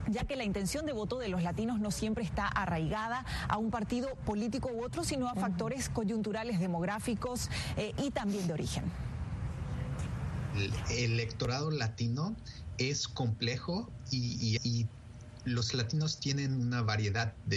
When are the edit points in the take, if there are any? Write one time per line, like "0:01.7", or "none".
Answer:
0:14.6